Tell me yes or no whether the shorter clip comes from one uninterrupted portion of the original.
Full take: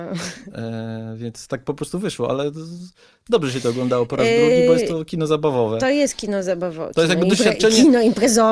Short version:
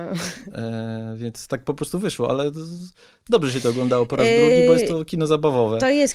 yes